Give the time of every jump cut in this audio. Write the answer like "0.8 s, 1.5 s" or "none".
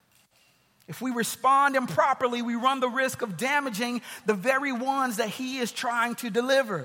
none